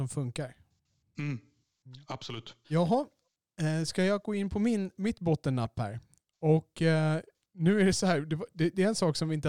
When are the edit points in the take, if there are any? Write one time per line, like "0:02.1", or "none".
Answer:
0:02.6

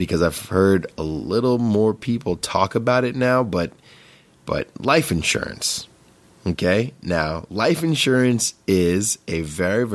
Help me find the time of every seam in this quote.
none

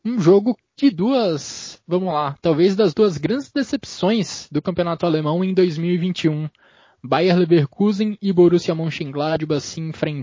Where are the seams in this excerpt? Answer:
none

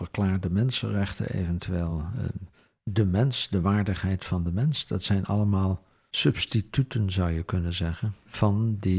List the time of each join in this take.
none

